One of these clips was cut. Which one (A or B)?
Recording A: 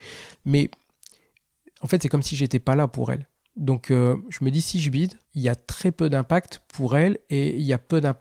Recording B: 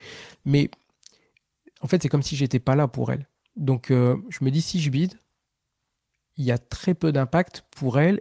A